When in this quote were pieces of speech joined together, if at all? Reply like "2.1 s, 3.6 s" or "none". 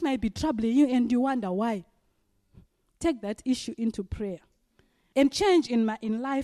5.1 s